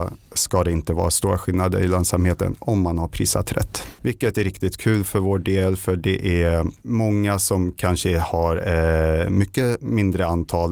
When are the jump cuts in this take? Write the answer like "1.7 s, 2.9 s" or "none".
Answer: 4.0 s